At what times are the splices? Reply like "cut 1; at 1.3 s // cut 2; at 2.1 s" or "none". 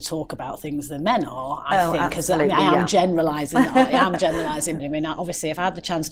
cut 1; at 4.8 s